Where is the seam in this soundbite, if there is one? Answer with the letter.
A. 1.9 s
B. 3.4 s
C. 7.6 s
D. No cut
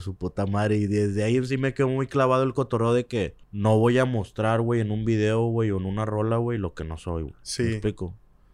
B